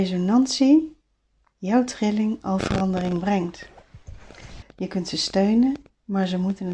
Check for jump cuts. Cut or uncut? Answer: cut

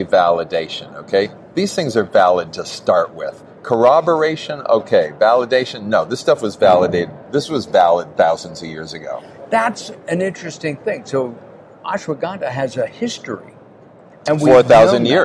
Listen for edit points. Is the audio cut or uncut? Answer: uncut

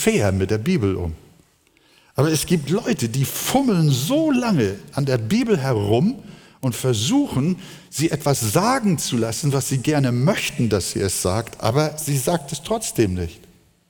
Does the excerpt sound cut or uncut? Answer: uncut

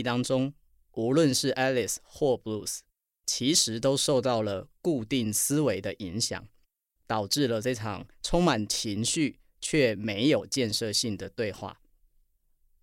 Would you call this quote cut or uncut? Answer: uncut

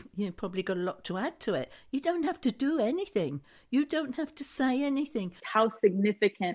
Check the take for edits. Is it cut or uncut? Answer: cut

